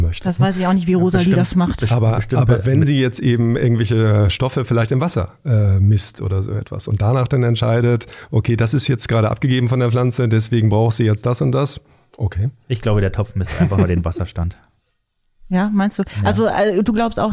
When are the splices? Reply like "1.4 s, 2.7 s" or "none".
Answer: none